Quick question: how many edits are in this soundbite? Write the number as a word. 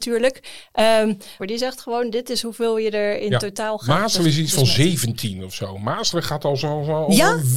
one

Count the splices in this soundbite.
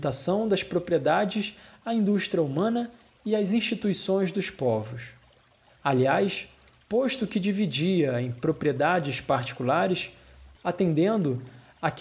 one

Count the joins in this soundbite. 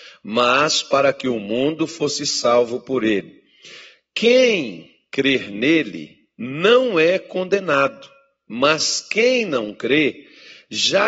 zero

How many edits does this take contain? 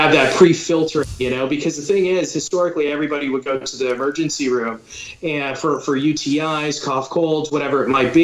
zero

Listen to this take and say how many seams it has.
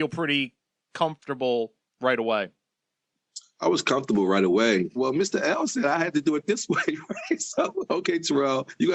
two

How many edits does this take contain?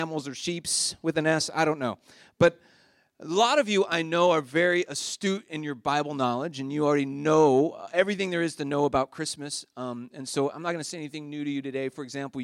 zero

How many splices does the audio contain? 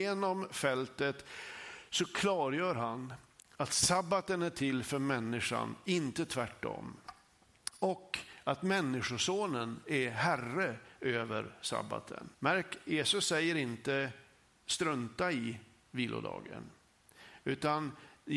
one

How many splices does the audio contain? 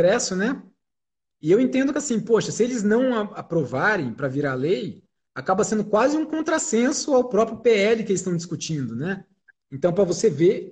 one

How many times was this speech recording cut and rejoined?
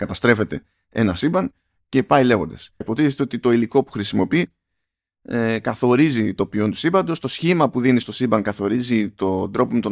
two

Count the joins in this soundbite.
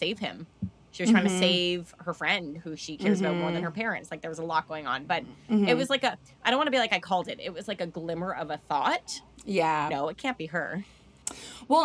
one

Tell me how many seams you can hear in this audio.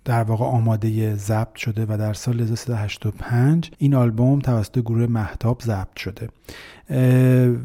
one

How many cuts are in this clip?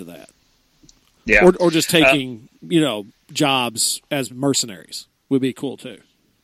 zero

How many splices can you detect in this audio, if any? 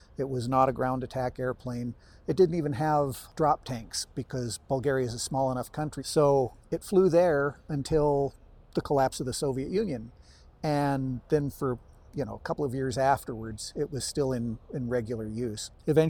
one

